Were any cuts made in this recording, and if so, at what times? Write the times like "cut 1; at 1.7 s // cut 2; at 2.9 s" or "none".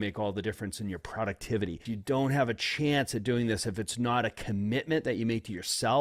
cut 1; at 1.9 s

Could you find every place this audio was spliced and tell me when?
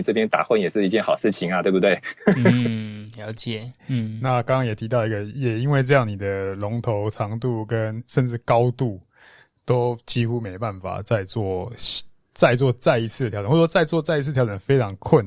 cut 1; at 3.8 s

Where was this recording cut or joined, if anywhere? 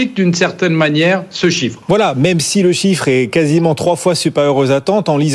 cut 1; at 1.8 s

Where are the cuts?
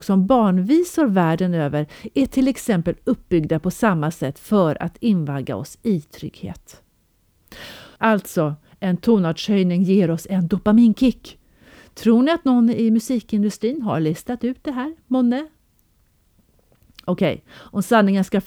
cut 1; at 8.0 s

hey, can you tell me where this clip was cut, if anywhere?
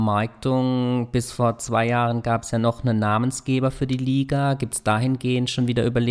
none

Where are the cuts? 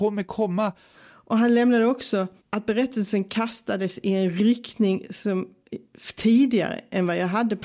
cut 1; at 0.9 s // cut 2; at 2.4 s

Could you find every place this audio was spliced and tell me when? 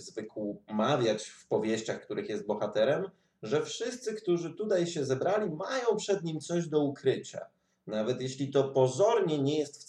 none

